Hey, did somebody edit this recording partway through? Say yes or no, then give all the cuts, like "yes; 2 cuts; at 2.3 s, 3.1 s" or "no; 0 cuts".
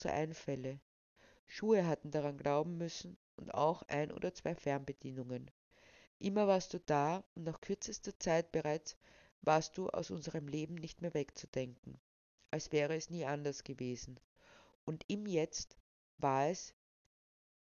yes; 1 cut; at 6.0 s